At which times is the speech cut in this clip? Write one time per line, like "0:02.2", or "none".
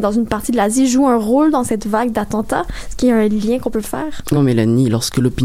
0:04.4